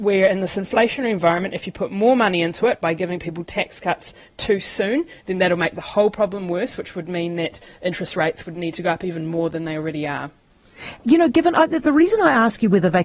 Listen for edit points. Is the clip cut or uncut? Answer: uncut